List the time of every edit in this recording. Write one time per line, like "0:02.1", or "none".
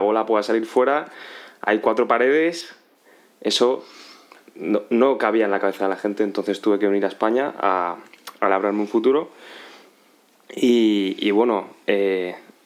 none